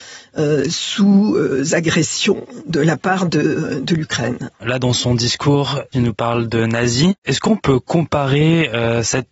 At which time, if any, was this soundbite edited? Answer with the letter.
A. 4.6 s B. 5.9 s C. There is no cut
B